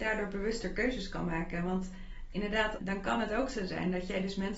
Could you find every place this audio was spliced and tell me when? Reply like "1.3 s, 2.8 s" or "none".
2.8 s